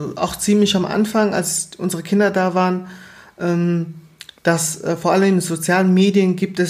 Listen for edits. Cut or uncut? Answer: uncut